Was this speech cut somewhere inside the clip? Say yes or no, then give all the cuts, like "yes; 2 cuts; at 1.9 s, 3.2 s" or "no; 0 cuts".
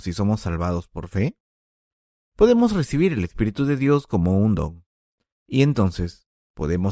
no; 0 cuts